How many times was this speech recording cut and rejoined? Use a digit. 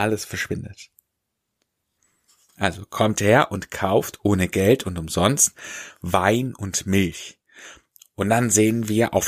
0